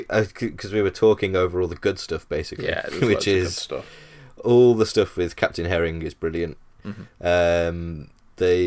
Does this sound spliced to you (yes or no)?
no